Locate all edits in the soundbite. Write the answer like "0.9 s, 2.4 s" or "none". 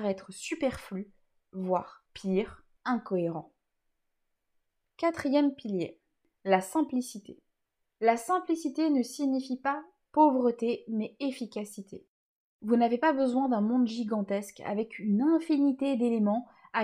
none